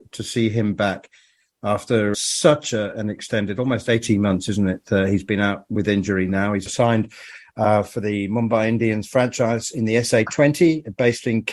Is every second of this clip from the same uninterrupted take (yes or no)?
no